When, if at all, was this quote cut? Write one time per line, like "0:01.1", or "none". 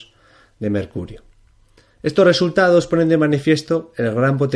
none